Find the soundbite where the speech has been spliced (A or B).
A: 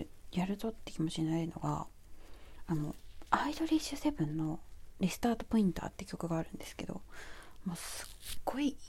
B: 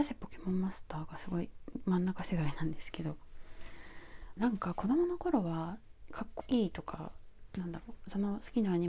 B